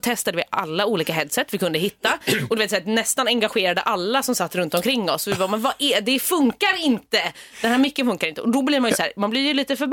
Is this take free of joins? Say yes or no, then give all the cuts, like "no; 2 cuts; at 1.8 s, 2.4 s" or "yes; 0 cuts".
yes; 0 cuts